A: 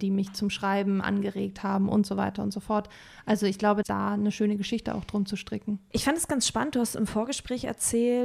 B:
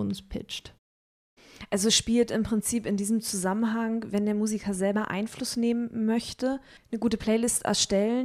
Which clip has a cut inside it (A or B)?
A